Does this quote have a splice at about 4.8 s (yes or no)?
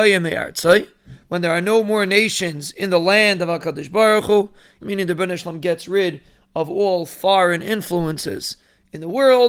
yes